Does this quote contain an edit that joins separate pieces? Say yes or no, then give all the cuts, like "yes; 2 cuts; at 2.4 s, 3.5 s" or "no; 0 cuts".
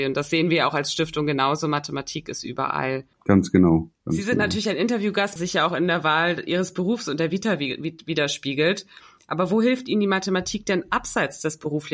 yes; 2 cuts; at 3.1 s, 5.4 s